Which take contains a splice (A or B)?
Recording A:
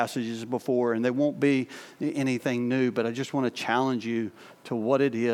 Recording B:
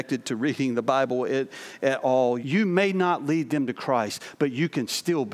B